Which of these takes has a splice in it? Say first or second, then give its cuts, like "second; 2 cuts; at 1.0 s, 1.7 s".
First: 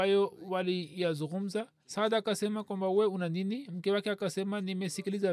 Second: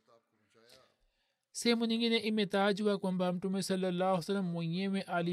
first; 1 cut; at 1.8 s